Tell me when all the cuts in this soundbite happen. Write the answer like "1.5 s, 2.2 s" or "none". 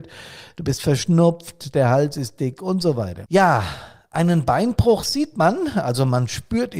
3.2 s